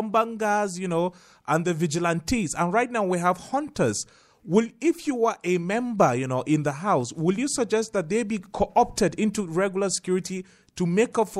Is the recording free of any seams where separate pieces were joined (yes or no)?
yes